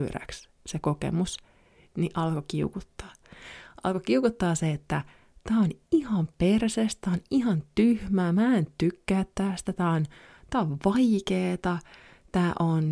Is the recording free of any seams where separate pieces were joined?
yes; 0 cuts

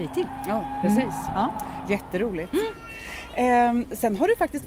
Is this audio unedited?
yes; 0 cuts

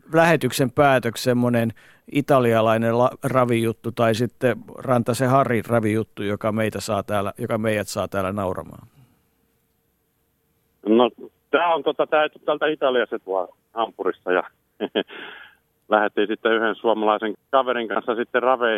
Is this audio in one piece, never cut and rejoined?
no; 2 cuts; at 13.2 s, 17.3 s

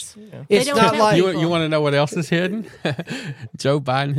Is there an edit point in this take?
no; 0 cuts

